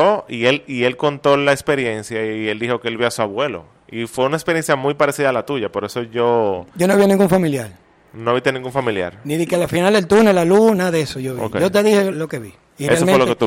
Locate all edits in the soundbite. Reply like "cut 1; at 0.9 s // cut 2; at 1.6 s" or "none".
cut 1; at 12.1 s